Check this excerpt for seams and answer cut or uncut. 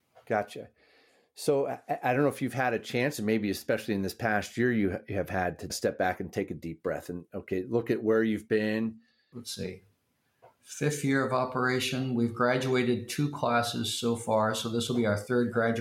cut